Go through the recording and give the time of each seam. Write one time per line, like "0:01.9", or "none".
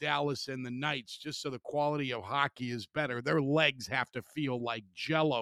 none